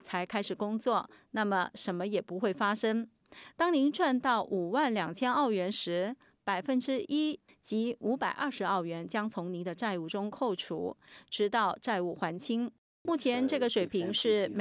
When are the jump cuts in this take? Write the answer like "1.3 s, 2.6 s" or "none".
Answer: 13.1 s